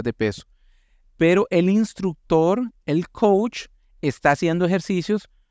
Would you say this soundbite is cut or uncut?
uncut